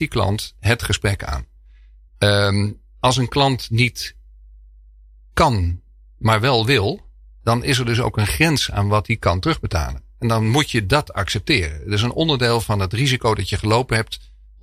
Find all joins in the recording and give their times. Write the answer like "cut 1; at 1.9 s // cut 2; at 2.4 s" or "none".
none

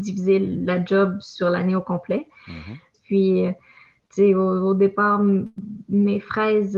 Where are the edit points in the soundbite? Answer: cut 1; at 2.9 s

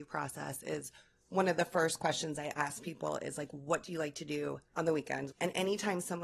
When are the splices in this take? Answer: cut 1; at 5.3 s

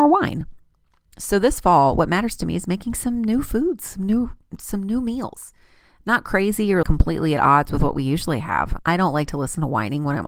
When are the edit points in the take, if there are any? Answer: cut 1; at 6.8 s // cut 2; at 8.8 s

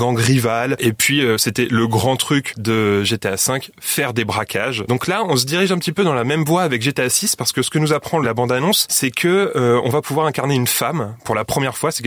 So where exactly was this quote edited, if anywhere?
none

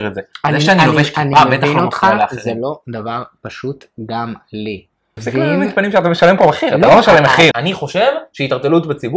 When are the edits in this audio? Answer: cut 1; at 5.2 s // cut 2; at 7.5 s

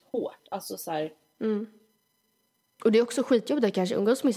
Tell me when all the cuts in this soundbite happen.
cut 1; at 2.8 s

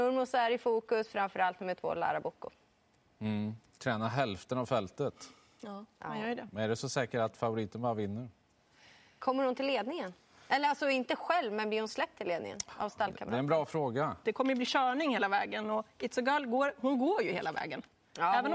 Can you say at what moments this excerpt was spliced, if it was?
cut 1; at 14.2 s

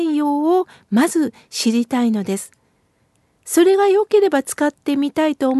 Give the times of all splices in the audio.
none

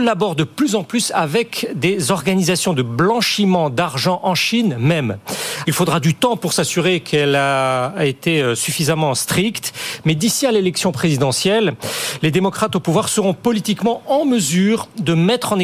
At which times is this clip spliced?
cut 1; at 5.6 s

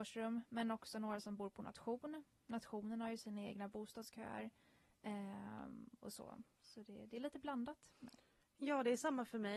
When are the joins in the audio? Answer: cut 1; at 6.5 s // cut 2; at 7.9 s

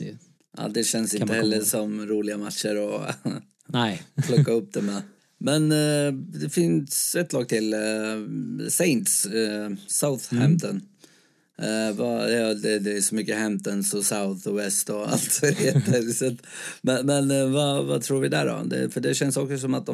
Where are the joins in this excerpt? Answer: none

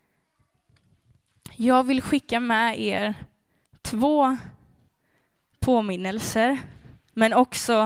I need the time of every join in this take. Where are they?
none

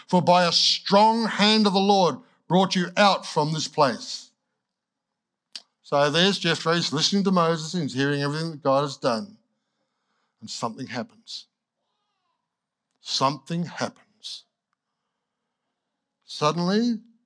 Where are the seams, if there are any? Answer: none

